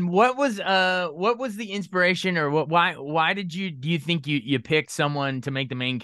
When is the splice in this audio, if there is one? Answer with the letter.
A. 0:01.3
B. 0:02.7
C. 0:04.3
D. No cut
D